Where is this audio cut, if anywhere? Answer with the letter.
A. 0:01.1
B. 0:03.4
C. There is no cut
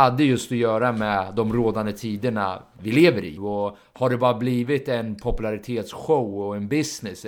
B